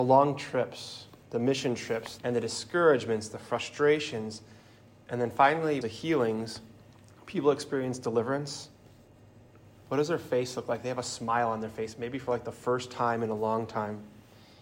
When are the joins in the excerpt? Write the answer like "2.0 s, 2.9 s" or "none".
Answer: 2.2 s, 5.8 s